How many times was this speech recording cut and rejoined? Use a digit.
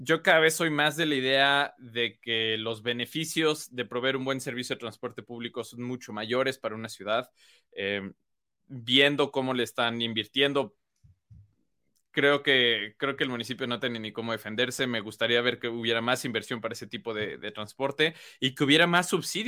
0